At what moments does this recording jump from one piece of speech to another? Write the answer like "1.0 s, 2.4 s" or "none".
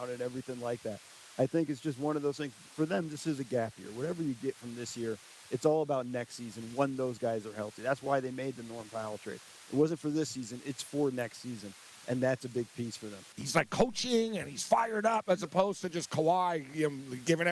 13.3 s